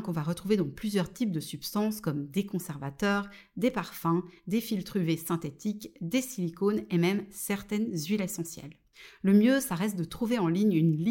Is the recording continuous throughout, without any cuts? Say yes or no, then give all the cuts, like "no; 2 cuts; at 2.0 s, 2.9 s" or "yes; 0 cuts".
yes; 0 cuts